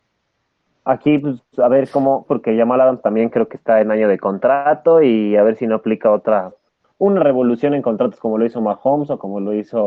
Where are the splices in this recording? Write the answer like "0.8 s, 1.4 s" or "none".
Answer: 2.2 s